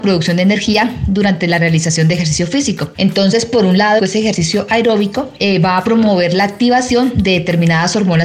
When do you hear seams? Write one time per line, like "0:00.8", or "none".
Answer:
0:02.9
0:04.0